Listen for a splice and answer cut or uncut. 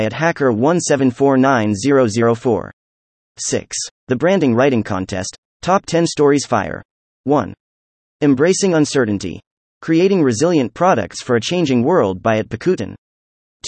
cut